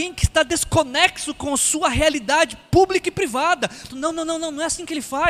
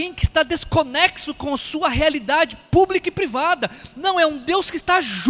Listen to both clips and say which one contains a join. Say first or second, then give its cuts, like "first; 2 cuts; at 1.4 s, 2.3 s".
first; 1 cut; at 3.9 s